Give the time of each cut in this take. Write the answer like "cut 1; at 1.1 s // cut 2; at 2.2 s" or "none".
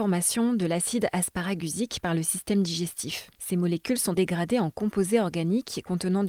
cut 1; at 4.1 s